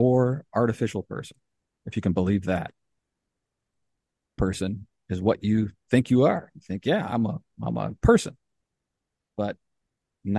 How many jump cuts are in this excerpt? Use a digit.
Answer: 1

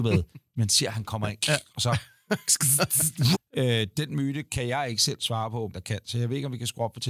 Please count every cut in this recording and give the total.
2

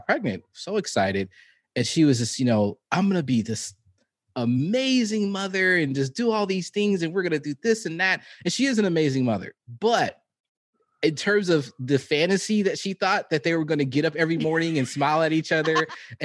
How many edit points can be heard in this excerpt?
1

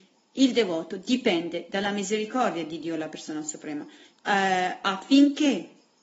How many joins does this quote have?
1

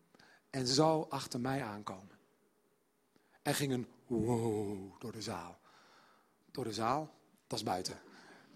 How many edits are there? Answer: 0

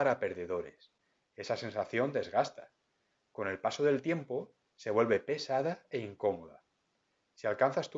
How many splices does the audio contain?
1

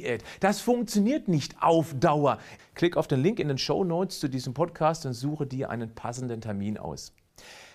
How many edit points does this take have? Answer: 1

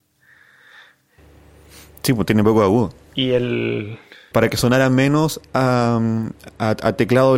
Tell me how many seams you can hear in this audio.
1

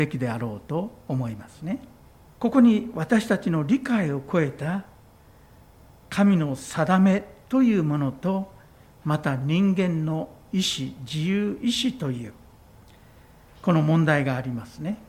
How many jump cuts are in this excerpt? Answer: 1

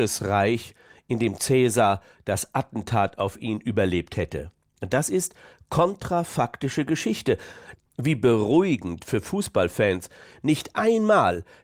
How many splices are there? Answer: 1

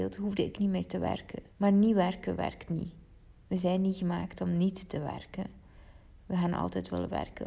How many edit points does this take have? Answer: 1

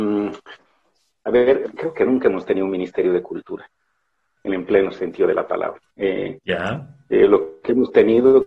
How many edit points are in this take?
3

